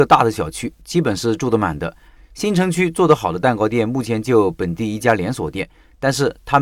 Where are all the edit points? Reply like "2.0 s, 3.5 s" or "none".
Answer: 2.2 s